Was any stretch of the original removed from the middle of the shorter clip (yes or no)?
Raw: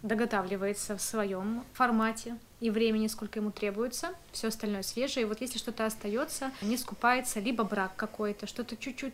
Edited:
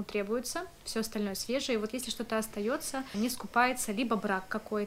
no